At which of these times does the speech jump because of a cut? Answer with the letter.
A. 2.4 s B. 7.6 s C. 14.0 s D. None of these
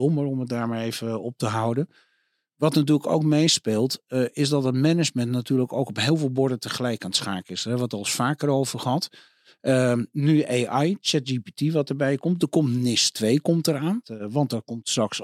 C